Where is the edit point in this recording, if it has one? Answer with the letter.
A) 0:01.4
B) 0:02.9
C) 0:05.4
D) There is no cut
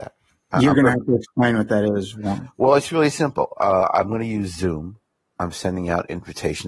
C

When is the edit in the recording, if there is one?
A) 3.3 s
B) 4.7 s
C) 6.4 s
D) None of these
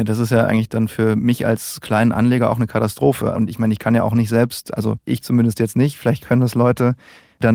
A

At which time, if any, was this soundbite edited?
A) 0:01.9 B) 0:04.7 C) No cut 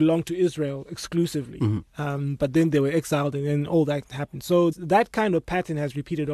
B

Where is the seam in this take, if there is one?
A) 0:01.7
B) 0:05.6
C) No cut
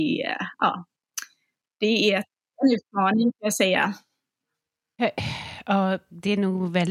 C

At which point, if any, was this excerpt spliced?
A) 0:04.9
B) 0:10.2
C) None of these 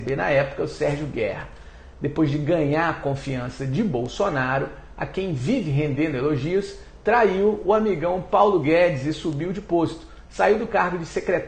C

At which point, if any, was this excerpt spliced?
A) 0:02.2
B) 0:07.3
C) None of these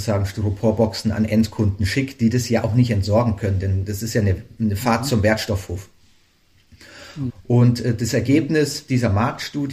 B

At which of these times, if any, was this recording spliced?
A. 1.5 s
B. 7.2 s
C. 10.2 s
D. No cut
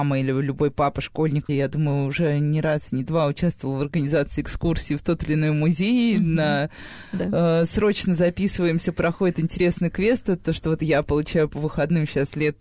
A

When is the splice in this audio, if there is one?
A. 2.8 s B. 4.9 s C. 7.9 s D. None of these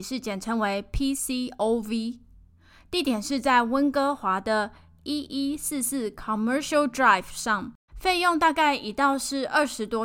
C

